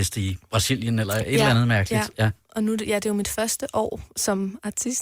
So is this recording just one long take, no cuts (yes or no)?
yes